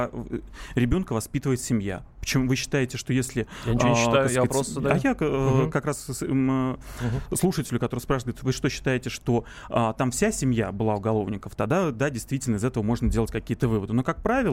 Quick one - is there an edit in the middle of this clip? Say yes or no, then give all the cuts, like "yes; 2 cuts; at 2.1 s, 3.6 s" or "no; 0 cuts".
no; 0 cuts